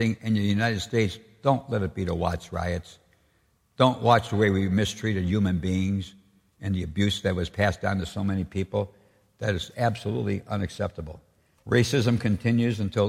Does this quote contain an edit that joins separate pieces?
yes; 1 cut; at 11.6 s

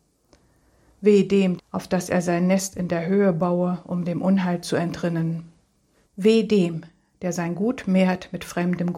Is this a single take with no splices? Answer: no; 2 cuts; at 1.6 s, 6.0 s

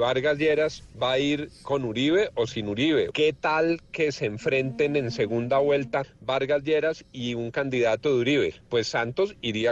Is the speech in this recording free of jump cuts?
no; 1 cut; at 3.1 s

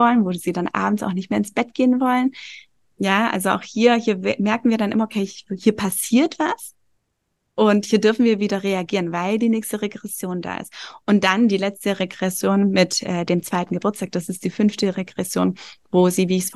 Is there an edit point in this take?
no; 0 cuts

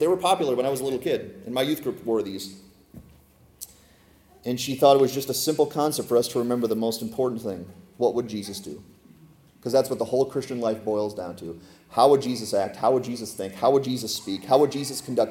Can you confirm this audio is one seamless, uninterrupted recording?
yes; 0 cuts

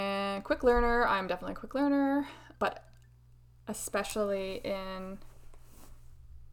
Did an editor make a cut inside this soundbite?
yes; 1 cut; at 2.5 s

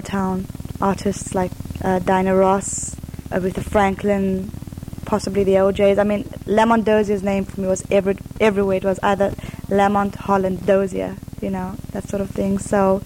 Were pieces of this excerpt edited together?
no; 0 cuts

